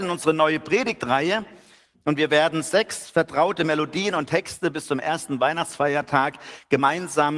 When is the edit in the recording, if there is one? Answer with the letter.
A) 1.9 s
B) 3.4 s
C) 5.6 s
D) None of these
A